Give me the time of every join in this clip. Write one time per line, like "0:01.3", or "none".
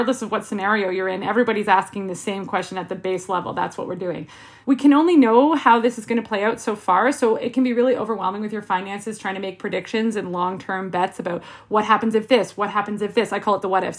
none